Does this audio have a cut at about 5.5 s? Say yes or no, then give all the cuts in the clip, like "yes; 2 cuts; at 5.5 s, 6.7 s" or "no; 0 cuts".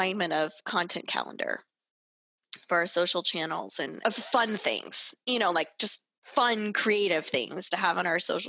no; 1 cut; at 4.0 s